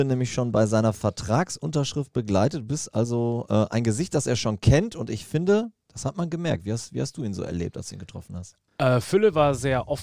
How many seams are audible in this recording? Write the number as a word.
zero